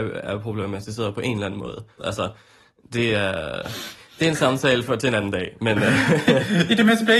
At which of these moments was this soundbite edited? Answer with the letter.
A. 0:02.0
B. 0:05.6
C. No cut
A